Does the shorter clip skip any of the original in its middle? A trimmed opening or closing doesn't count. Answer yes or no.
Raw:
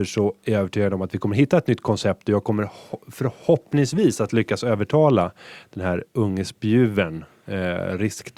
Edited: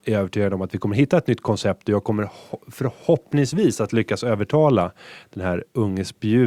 no